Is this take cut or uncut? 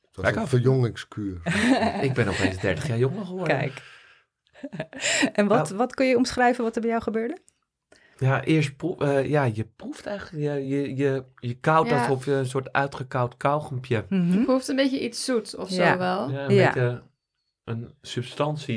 uncut